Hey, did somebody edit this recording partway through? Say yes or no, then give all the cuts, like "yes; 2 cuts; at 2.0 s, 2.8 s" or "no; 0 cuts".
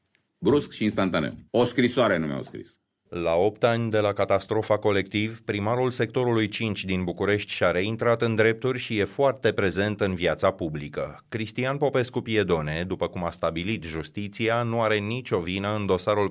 yes; 1 cut; at 1.5 s